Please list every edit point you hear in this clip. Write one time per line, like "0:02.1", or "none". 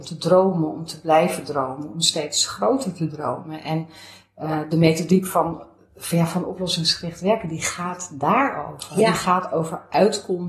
none